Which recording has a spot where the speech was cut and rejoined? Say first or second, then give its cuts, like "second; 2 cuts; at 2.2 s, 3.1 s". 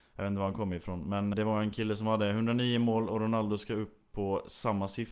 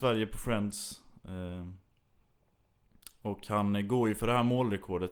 first; 1 cut; at 1.3 s